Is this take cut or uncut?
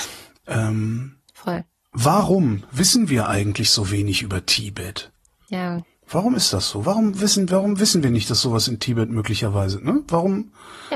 uncut